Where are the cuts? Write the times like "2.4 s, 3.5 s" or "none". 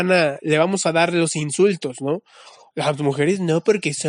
2.7 s